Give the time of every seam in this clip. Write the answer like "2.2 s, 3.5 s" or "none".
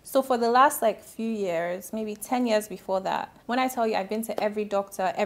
3.4 s